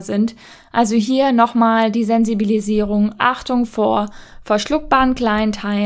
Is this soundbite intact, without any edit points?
yes; 0 cuts

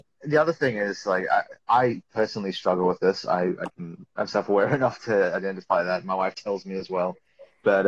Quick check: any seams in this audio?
no; 0 cuts

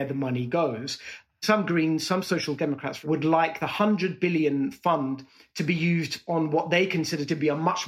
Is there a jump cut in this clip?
no; 0 cuts

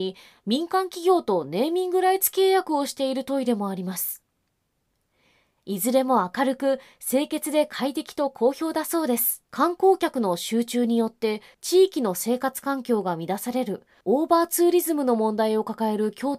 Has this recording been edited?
yes; 1 cut; at 9.5 s

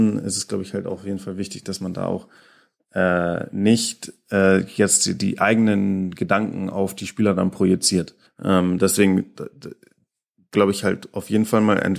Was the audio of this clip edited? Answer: yes; 2 cuts; at 8.3 s, 10.5 s

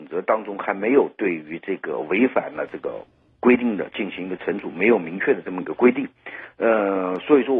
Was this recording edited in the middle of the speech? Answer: no; 0 cuts

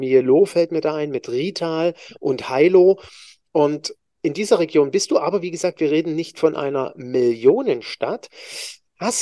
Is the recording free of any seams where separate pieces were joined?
yes; 0 cuts

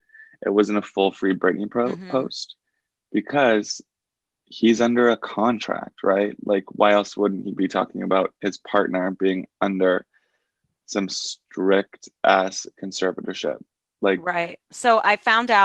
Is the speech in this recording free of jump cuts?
yes; 0 cuts

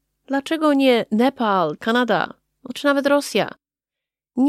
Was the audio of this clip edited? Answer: yes; 1 cut; at 1.8 s

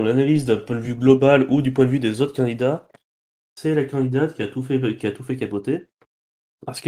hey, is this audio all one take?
yes; 0 cuts

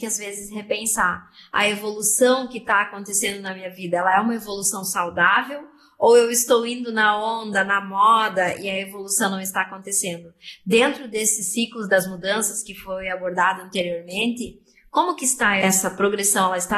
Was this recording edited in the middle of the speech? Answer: no; 0 cuts

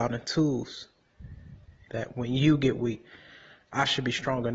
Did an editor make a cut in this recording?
yes; 1 cut; at 1.9 s

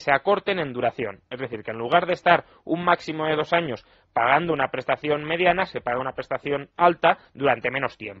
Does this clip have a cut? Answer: no; 0 cuts

